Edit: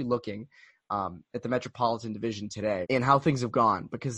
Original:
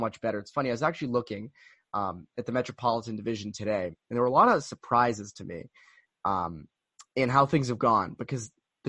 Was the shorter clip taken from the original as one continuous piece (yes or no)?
no